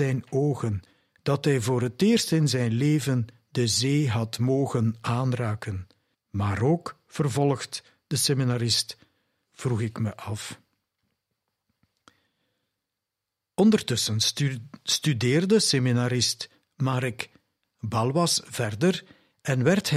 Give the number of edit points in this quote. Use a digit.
2